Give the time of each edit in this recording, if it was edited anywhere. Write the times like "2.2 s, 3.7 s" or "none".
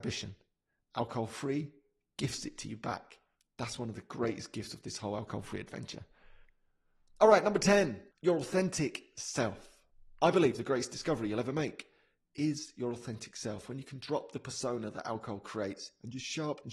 8.1 s

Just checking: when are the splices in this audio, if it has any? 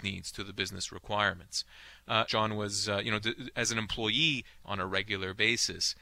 2.3 s, 4.6 s

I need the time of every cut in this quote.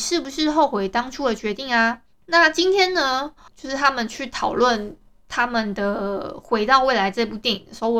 2.1 s, 3.5 s

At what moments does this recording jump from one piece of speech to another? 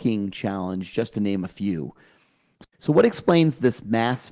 2.7 s

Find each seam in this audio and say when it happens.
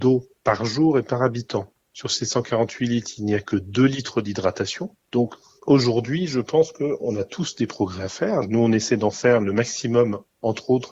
5.1 s

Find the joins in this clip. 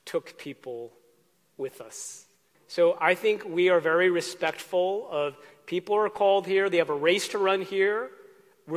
2.5 s

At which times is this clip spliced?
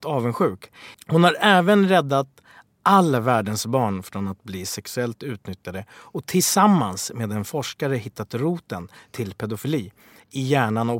0.9 s

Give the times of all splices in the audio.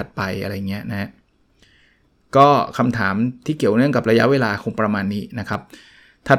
none

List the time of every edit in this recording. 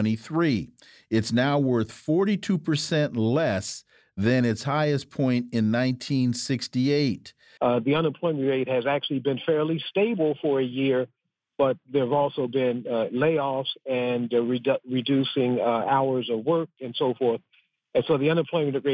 7.6 s

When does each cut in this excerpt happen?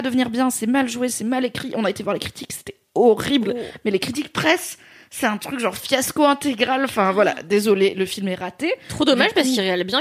none

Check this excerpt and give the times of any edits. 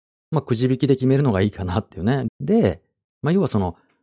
2.3 s

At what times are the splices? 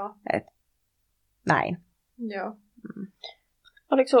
none

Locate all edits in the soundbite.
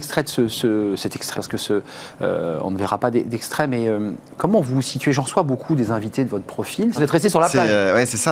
1.3 s, 6.9 s

